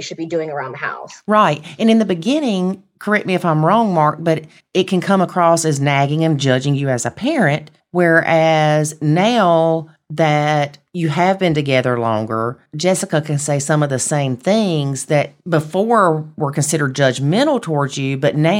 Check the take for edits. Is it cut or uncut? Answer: uncut